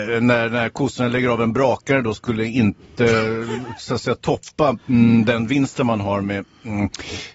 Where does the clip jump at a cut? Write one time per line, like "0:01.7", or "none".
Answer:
none